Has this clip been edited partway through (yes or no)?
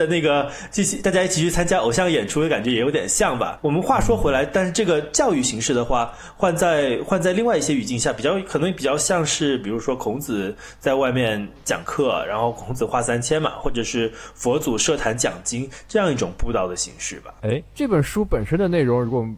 no